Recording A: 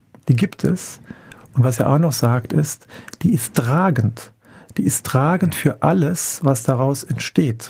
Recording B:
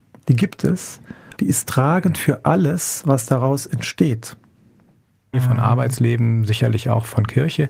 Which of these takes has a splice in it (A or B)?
B